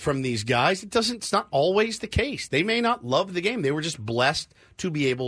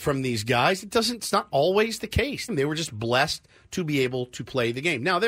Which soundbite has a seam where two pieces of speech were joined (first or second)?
second